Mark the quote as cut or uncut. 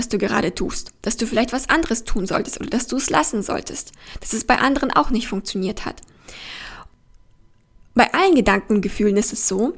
uncut